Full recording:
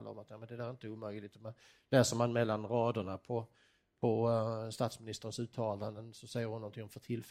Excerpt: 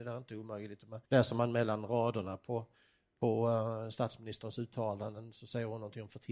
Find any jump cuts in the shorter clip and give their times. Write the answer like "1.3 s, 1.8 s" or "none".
1.0 s